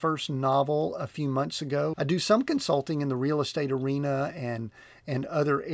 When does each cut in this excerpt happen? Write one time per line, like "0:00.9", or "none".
0:01.9